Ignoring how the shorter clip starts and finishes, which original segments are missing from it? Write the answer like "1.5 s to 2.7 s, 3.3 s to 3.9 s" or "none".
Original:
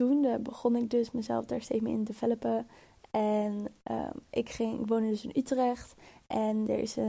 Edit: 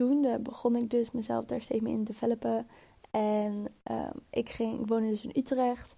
none